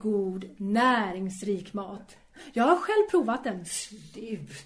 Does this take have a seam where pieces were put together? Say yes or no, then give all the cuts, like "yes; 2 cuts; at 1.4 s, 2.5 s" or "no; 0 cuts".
no; 0 cuts